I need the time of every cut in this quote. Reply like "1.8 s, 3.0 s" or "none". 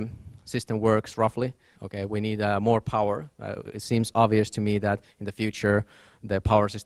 1.7 s